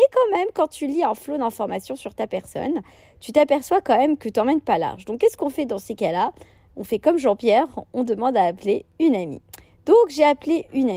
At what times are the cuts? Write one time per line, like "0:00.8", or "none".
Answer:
none